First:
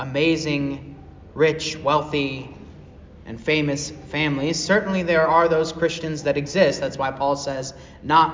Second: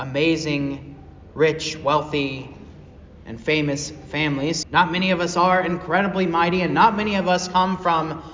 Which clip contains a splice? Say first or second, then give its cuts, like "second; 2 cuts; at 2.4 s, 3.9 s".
second; 1 cut; at 4.6 s